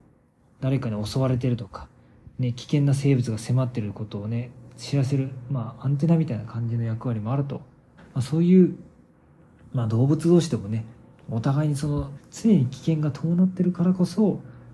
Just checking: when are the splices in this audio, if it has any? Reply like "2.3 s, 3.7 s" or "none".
8.0 s, 12.2 s